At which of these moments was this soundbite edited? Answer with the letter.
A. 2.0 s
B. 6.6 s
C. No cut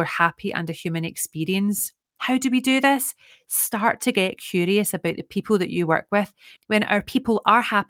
B